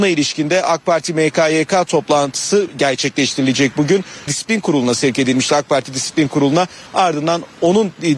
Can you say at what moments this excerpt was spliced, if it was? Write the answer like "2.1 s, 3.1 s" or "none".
4.3 s